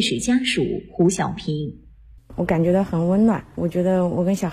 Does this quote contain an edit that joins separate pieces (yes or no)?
no